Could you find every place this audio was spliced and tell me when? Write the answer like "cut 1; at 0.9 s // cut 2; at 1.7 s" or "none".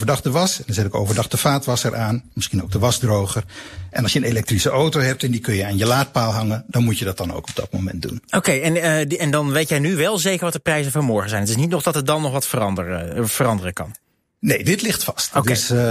none